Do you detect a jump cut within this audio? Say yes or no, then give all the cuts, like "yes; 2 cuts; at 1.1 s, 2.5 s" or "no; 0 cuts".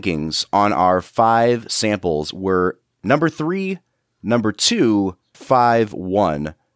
yes; 1 cut; at 5.3 s